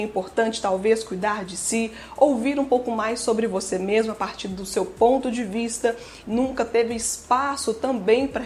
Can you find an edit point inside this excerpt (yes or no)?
yes